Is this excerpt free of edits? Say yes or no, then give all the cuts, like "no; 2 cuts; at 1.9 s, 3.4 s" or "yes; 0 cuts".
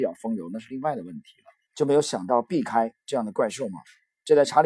no; 1 cut; at 1.7 s